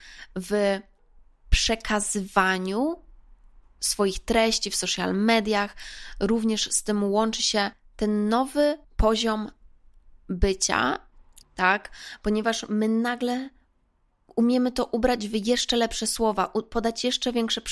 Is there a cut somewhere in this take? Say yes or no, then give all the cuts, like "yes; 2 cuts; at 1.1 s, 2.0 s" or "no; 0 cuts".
yes; 1 cut; at 11.4 s